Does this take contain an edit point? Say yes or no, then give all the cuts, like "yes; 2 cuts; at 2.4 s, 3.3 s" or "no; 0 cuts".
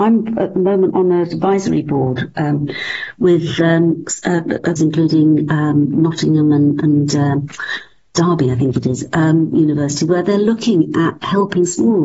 yes; 1 cut; at 4.8 s